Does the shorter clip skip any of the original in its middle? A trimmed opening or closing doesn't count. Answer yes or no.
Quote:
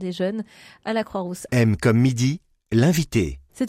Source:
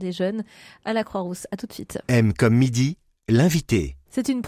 yes